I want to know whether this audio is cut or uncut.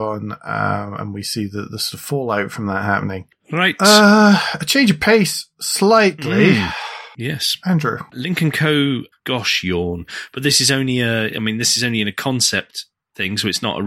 cut